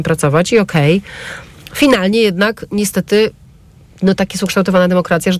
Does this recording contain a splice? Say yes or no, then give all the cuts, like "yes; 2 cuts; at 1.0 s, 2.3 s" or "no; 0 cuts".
no; 0 cuts